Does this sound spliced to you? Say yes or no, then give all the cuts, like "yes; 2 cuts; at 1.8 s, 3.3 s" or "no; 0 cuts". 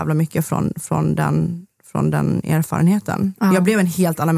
no; 0 cuts